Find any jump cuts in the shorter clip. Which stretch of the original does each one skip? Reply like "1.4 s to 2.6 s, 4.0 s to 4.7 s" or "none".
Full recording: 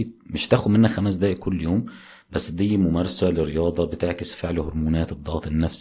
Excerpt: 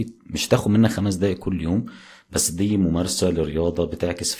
none